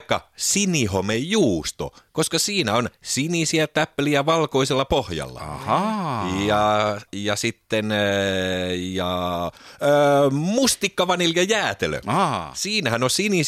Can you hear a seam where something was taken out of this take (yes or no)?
yes